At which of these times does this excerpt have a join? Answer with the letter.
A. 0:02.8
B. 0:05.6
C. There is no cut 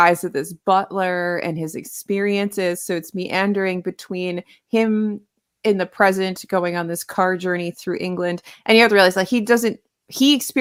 C